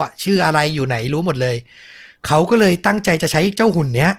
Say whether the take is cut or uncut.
uncut